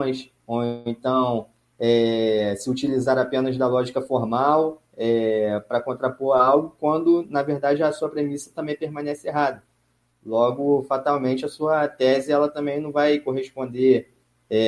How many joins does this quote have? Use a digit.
0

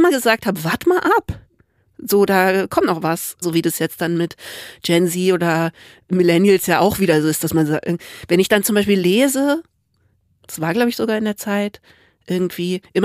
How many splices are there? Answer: 1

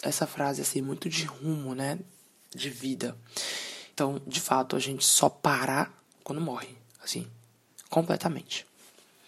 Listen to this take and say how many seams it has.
1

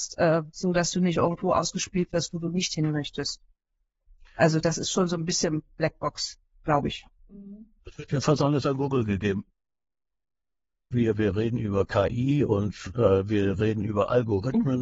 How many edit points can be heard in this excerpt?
2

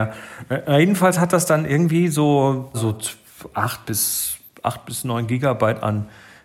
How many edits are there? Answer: 1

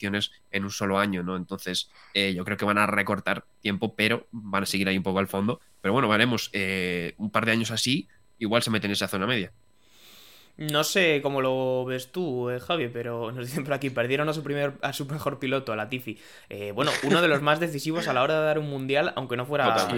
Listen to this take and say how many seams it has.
0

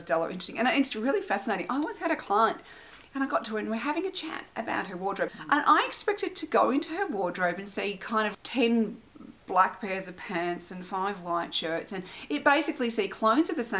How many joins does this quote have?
2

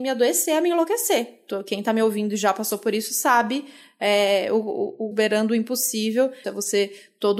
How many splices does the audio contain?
2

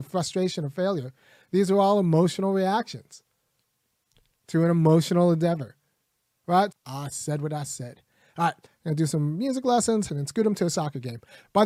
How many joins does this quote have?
3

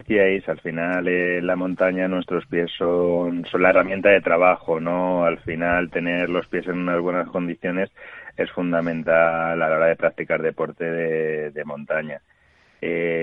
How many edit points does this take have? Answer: 0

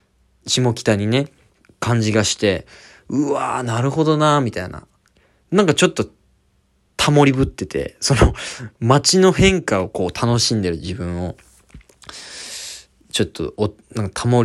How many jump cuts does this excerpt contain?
0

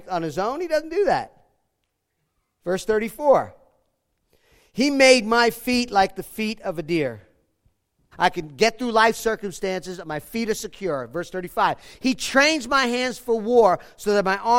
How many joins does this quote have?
1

